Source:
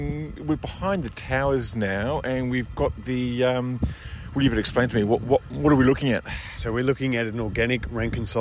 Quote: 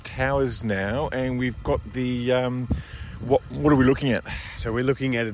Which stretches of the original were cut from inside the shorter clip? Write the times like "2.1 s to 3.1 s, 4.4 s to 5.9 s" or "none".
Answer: 4.3 s to 5.2 s